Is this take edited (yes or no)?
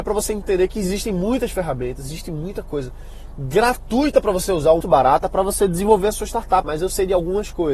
yes